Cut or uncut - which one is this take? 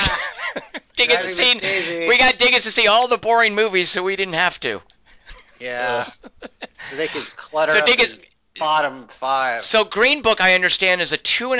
uncut